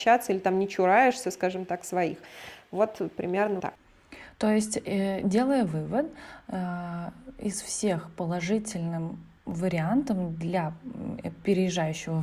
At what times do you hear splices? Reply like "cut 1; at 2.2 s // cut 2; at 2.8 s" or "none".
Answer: cut 1; at 3.6 s